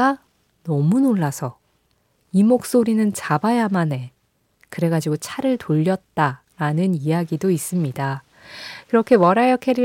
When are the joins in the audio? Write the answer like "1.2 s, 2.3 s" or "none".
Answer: none